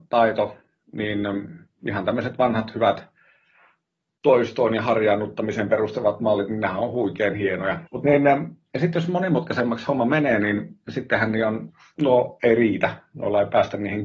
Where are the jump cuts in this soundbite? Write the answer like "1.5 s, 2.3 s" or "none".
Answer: 7.9 s